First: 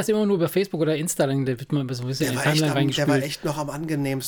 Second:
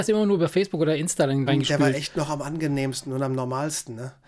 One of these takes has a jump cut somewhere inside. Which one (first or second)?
second